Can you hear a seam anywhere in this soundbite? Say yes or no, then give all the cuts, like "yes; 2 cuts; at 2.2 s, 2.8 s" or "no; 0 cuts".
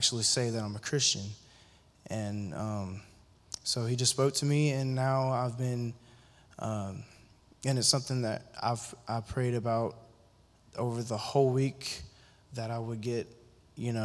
no; 0 cuts